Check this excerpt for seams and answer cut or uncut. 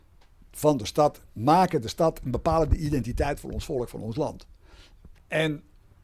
cut